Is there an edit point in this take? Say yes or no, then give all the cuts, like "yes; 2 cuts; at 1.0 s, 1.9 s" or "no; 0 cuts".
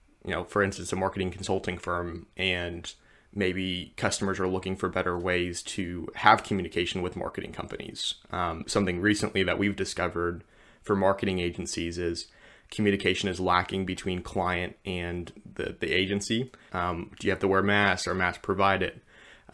yes; 2 cuts; at 8.6 s, 16.7 s